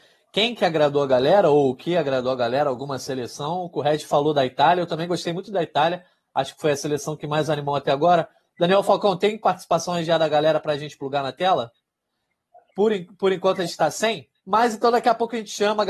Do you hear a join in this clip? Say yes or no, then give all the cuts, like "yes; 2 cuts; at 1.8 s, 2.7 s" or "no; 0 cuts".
yes; 1 cut; at 14.4 s